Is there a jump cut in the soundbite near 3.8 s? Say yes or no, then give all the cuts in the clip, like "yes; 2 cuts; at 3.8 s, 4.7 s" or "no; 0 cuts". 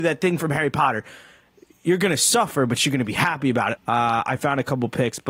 yes; 1 cut; at 3.8 s